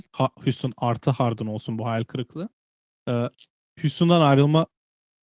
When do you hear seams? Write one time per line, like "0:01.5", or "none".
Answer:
none